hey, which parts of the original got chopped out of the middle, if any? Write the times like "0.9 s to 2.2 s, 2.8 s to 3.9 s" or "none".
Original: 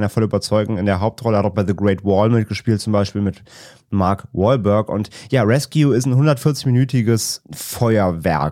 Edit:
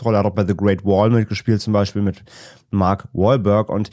none